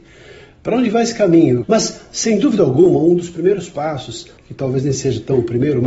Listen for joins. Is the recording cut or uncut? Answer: cut